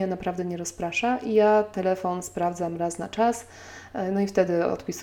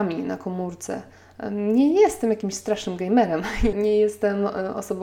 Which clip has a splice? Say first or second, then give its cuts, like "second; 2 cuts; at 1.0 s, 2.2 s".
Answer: second; 1 cut; at 3.7 s